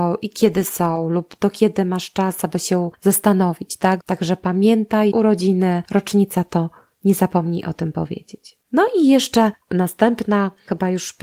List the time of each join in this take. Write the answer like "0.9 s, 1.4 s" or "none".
4.0 s, 5.1 s, 8.6 s